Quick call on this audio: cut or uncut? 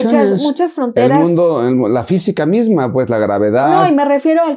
uncut